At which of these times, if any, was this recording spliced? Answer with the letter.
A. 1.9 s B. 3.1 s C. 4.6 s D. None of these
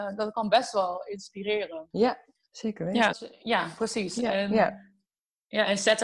B